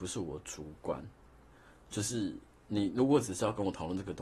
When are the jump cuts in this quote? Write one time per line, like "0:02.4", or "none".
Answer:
none